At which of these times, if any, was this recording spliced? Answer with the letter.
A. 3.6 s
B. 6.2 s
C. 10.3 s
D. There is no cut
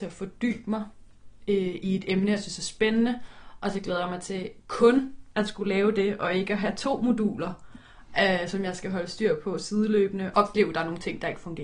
C